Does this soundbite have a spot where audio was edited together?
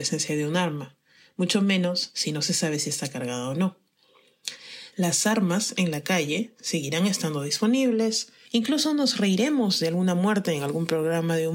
yes; 2 cuts; at 4.9 s, 8.5 s

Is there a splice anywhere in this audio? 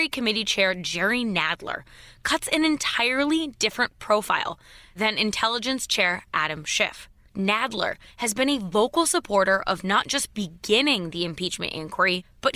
no; 0 cuts

